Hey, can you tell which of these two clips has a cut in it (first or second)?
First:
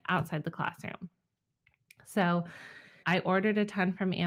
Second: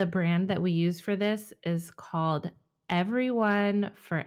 first